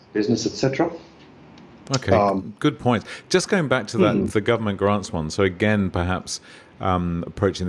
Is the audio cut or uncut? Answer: uncut